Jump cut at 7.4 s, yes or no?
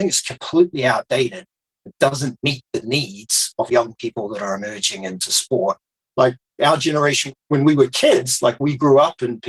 no